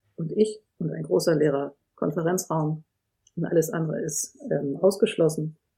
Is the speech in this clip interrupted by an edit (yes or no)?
no